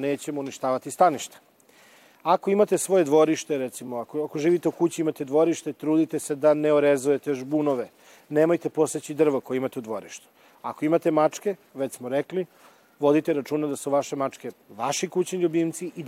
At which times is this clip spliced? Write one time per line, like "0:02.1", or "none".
none